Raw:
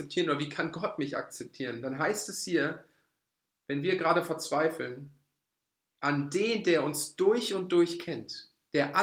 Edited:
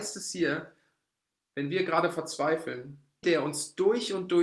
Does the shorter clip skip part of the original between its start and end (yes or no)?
yes